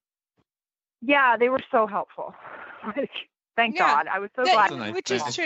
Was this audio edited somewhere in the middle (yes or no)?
no